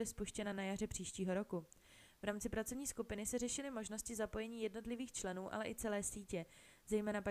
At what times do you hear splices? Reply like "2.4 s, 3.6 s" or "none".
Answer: none

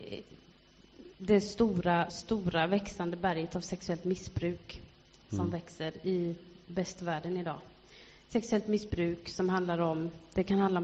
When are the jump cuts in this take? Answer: 2.1 s

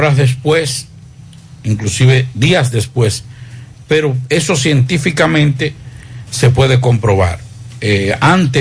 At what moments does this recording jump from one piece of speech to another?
3.8 s

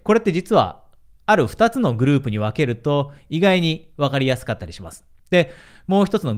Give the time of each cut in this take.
5.2 s

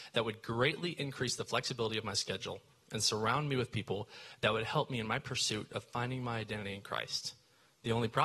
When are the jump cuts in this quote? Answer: none

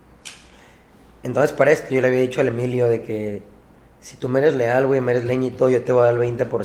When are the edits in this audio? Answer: none

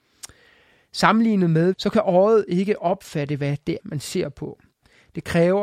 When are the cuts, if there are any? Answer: 1.7 s, 3.8 s

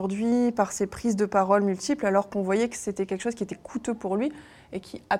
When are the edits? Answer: none

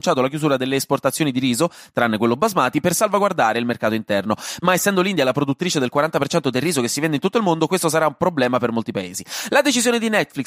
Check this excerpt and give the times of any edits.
none

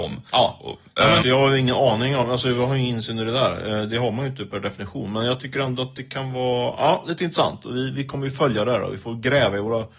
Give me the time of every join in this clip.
1.2 s

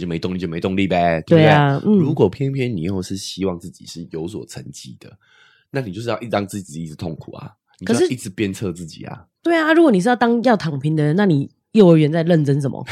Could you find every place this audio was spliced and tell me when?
none

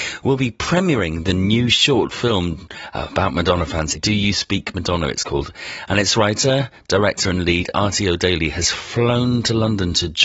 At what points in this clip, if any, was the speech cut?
3.9 s

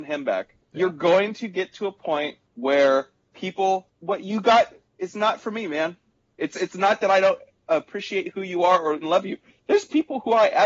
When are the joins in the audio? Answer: 9.0 s

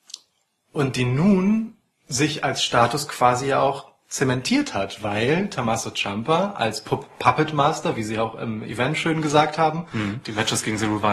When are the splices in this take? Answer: 10.2 s

